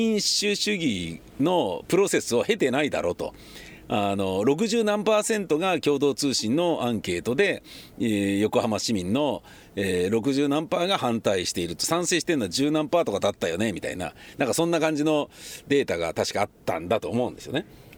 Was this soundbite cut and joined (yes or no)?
no